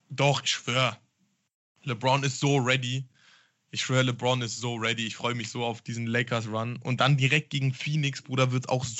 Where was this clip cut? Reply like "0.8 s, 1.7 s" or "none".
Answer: none